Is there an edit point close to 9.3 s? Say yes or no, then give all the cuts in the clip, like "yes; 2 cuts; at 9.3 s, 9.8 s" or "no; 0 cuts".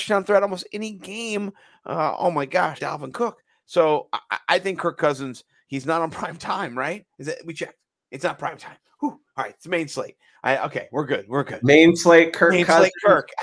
no; 1 cut; at 2.8 s